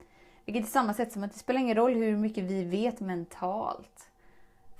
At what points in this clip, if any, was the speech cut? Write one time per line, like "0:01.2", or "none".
none